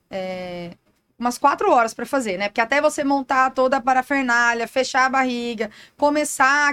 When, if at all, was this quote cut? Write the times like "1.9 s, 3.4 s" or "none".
none

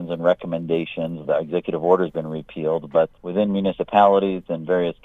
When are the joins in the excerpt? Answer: 1.2 s, 3.2 s

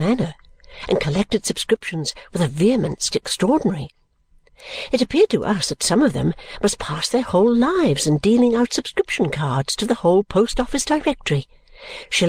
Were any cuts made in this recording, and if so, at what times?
3.1 s

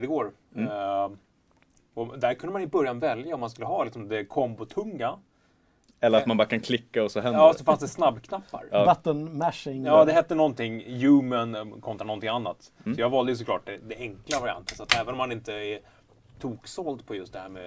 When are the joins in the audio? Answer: none

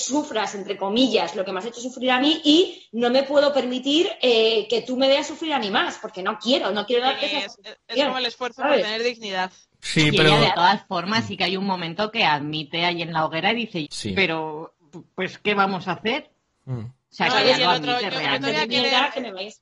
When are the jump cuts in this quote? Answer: 13.8 s

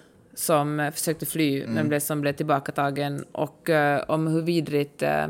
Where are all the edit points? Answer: none

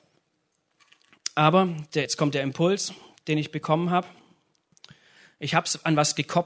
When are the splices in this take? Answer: none

